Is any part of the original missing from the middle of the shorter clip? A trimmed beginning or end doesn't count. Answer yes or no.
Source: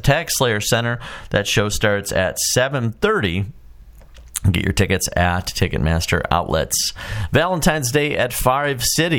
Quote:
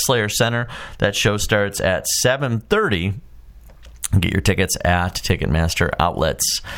no